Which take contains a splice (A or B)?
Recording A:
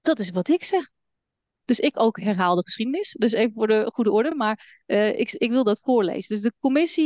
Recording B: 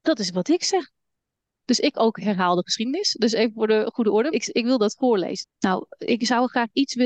B